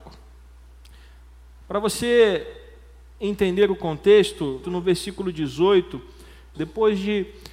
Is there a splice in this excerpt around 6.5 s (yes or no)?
yes